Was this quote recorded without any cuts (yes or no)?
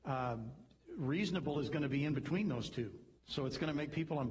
no